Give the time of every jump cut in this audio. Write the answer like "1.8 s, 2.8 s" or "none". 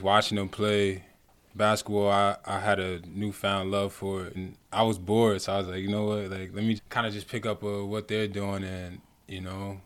4.3 s, 6.8 s